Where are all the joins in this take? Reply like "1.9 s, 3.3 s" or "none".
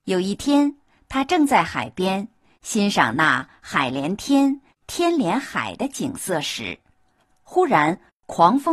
none